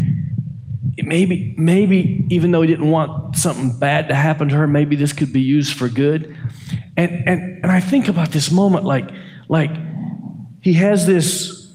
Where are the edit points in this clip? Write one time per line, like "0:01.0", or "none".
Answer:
none